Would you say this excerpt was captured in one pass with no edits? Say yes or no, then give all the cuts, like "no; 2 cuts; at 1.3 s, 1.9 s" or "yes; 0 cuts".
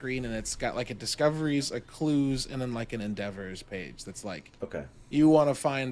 yes; 0 cuts